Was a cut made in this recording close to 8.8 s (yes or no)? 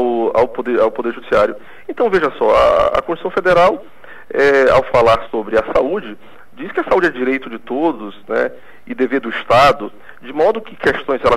no